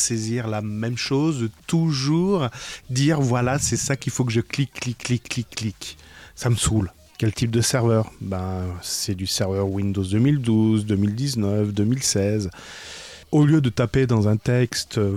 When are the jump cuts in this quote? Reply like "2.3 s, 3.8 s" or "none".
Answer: 5.2 s, 7.1 s, 13.2 s